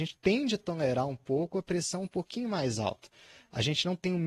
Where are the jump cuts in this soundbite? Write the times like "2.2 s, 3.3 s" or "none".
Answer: none